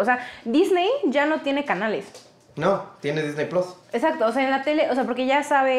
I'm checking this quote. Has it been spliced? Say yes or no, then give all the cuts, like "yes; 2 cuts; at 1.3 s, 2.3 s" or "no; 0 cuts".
yes; 1 cut; at 3.8 s